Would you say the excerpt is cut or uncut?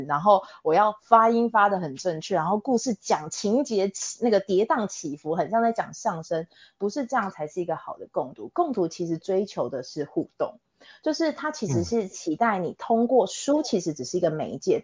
uncut